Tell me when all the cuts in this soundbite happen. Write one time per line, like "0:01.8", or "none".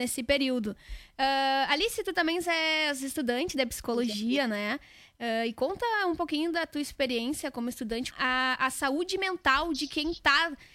0:08.1